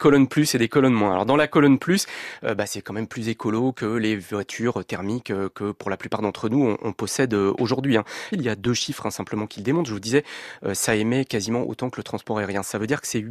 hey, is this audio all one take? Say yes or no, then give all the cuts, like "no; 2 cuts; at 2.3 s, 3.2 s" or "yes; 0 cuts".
no; 1 cut; at 8.3 s